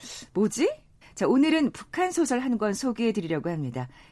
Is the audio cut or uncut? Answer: cut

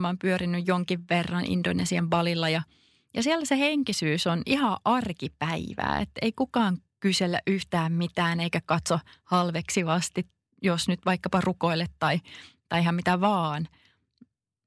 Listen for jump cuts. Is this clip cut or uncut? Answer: uncut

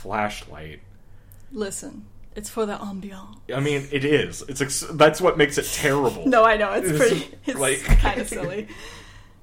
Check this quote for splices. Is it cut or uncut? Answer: uncut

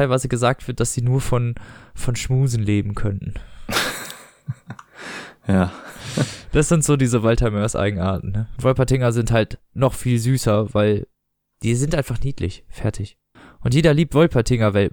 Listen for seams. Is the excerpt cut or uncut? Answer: cut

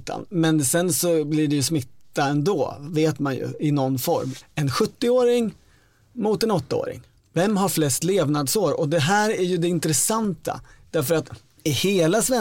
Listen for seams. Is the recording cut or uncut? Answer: cut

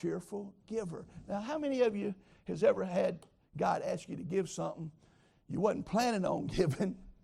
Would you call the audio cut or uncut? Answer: uncut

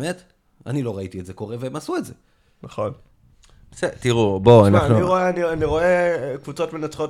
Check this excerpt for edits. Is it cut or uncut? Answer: uncut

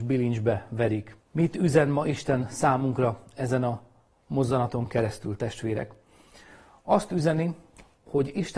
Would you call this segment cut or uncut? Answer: cut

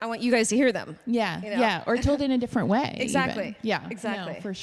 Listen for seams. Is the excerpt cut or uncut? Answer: uncut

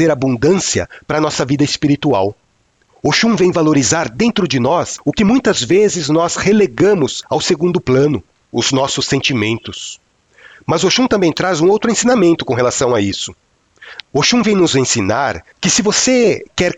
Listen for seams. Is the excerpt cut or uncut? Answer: cut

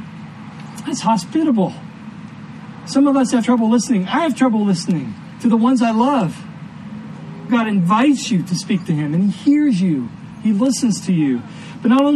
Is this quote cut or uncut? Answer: cut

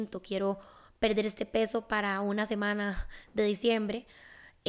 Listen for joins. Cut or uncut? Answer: uncut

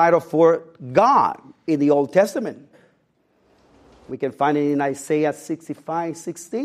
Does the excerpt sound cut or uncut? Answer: uncut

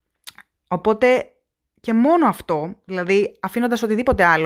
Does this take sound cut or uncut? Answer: uncut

